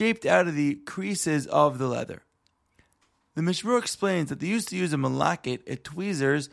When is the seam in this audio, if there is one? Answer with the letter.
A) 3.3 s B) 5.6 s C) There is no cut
C